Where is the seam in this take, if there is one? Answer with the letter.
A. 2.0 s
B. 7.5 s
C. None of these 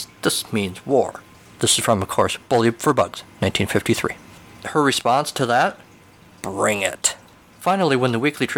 B